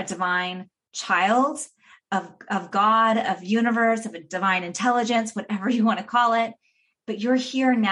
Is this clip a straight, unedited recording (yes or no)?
yes